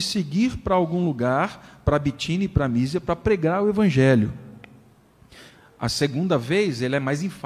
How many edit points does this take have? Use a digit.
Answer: 0